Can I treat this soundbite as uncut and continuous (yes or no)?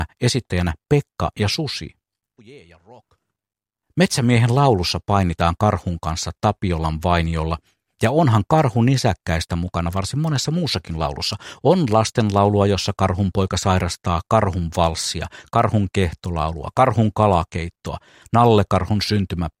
no